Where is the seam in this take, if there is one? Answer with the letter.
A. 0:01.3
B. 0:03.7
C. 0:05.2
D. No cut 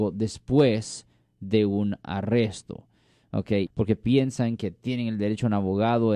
B